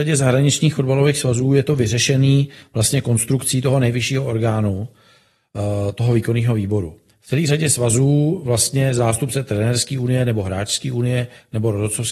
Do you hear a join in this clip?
no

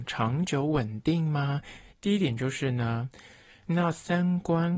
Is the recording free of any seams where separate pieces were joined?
no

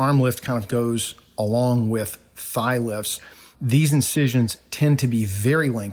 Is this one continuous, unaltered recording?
yes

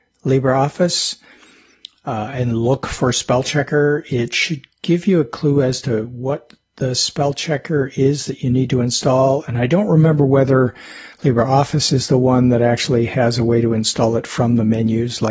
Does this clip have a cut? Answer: no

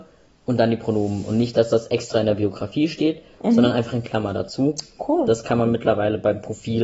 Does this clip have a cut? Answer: no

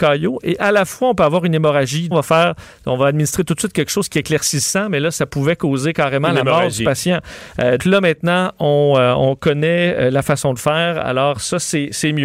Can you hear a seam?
yes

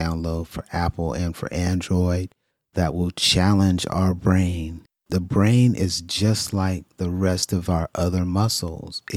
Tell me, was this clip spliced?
no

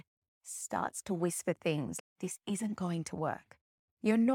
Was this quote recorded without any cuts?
no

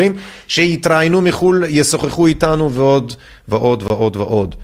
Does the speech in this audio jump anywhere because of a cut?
no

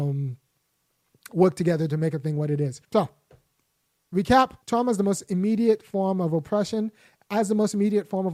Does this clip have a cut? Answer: yes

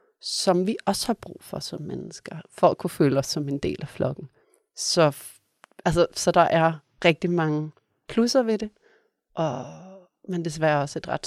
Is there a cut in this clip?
no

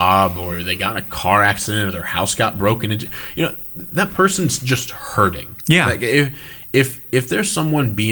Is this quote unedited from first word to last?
yes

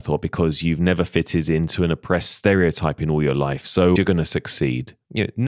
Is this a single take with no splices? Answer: no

